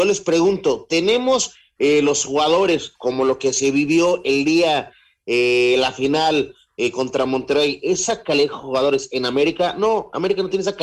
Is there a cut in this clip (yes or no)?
no